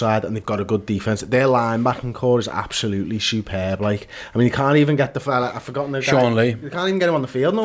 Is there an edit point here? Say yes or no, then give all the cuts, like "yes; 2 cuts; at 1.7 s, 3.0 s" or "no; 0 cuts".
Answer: no; 0 cuts